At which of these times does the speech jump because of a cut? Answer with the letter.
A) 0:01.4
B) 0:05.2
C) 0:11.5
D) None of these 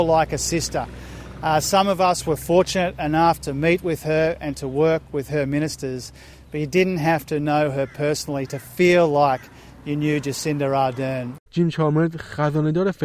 C